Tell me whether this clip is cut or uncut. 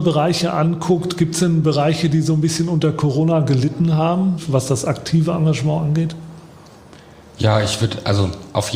uncut